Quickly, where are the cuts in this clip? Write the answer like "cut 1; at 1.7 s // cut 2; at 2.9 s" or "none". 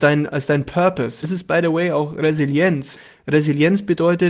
cut 1; at 1.2 s